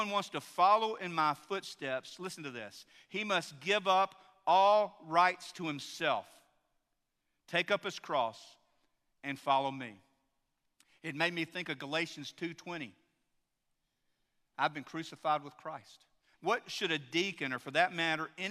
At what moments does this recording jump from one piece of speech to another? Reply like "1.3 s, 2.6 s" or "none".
16.3 s